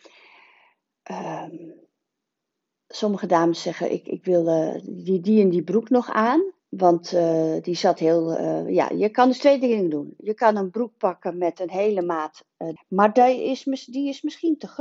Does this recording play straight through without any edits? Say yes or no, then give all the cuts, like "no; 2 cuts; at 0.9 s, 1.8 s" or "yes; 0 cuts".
no; 2 cuts; at 6.6 s, 12.8 s